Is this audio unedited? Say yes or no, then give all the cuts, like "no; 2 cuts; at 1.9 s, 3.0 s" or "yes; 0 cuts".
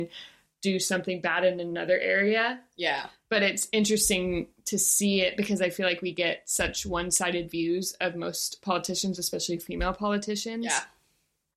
yes; 0 cuts